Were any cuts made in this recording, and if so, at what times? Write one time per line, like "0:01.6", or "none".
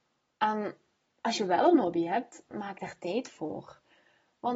0:02.5